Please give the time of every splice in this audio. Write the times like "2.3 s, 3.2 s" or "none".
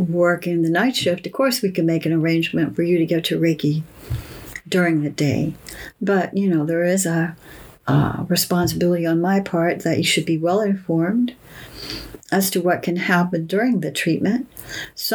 none